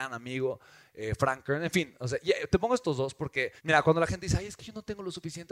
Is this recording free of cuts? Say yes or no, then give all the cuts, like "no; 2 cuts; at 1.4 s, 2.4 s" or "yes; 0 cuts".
no; 1 cut; at 3.6 s